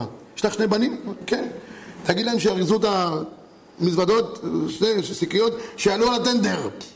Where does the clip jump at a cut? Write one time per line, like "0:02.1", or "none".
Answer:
none